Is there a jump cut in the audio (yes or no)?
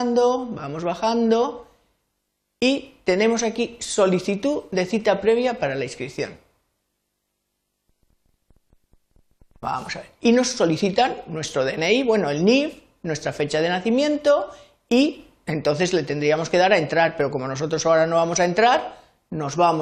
no